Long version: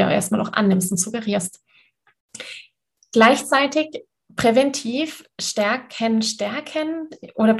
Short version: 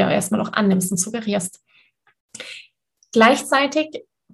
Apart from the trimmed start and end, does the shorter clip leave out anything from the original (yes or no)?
no